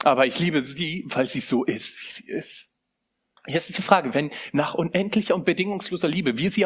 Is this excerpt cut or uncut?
cut